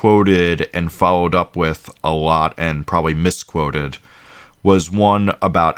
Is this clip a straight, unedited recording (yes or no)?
yes